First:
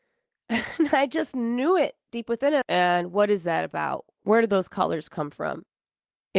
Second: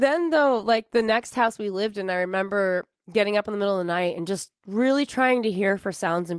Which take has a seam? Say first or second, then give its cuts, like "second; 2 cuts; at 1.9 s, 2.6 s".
first; 1 cut; at 2.6 s